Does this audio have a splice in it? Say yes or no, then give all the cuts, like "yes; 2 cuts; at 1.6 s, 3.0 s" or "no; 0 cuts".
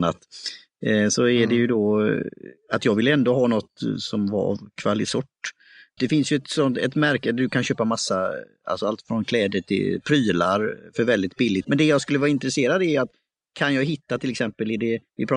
yes; 2 cuts; at 6.0 s, 11.6 s